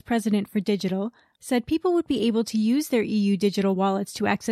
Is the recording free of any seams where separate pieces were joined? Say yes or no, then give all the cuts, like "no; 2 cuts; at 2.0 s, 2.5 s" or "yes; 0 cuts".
no; 1 cut; at 1.4 s